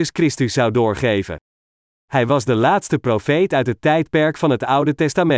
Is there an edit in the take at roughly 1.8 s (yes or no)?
no